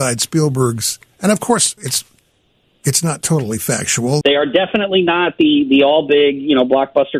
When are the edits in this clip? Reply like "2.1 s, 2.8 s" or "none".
1.8 s, 4.2 s